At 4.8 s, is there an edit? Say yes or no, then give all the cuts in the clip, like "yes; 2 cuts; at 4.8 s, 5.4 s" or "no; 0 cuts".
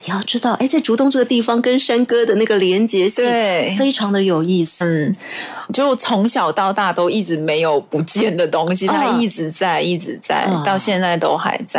yes; 1 cut; at 4.8 s